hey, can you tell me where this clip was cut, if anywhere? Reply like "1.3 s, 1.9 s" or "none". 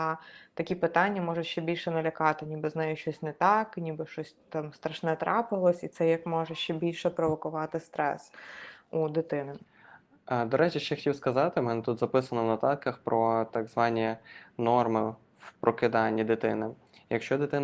none